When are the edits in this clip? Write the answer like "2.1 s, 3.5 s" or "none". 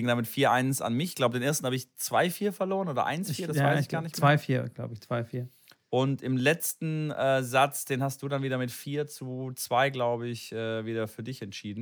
none